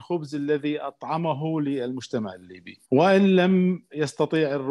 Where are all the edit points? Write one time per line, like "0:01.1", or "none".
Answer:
0:02.8